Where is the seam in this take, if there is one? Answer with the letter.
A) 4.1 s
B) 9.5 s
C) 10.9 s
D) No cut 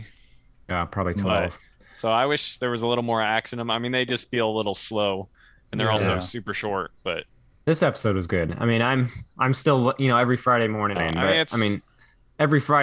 C